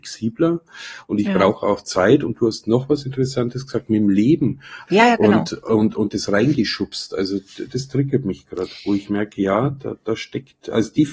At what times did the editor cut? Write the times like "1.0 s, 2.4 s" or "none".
4.9 s